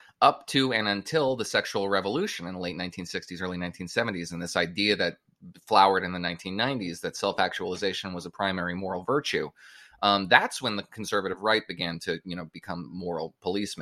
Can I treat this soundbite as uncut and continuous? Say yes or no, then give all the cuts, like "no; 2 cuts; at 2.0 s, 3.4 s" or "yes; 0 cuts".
yes; 0 cuts